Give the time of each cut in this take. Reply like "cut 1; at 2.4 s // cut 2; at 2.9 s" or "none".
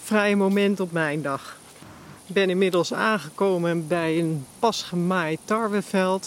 cut 1; at 2.2 s